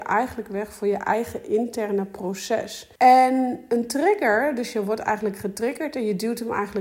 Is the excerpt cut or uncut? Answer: cut